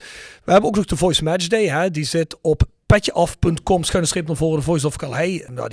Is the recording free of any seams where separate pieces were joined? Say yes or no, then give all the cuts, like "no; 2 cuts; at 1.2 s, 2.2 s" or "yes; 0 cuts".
yes; 0 cuts